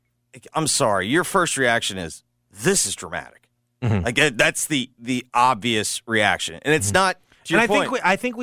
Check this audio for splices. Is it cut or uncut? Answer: uncut